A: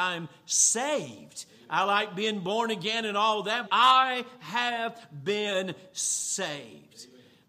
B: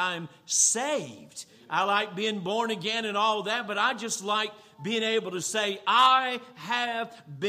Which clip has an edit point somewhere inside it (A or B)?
A